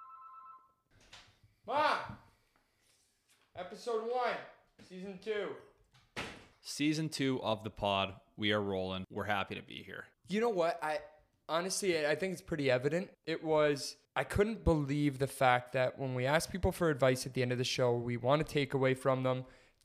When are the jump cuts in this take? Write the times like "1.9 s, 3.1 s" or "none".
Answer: 10.2 s